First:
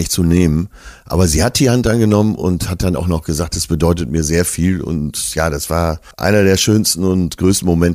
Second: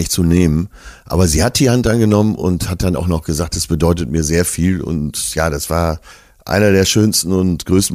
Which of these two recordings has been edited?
first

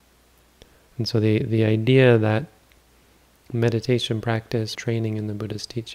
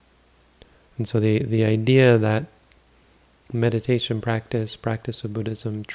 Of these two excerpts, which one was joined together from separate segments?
first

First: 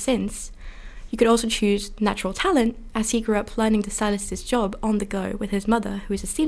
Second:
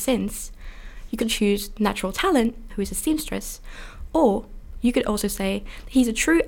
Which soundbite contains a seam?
second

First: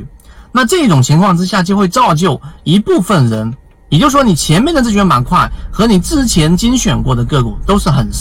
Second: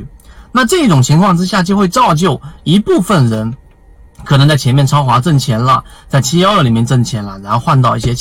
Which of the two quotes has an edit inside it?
first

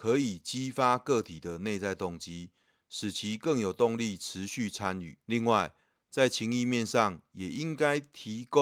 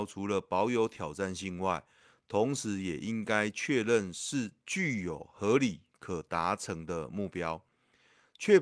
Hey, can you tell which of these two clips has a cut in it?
first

